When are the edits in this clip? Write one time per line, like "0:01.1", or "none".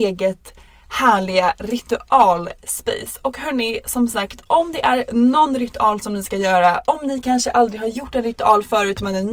none